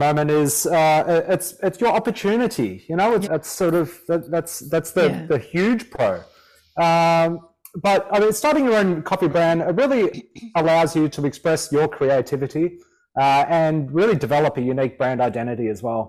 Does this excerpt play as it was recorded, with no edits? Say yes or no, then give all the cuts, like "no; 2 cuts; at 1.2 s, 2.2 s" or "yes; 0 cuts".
no; 1 cut; at 3.2 s